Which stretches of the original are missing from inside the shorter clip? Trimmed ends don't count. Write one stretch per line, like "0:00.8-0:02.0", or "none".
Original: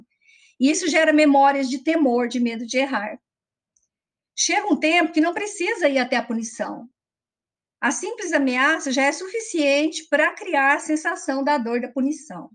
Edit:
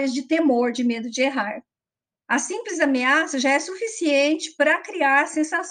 0:03.7-0:07.7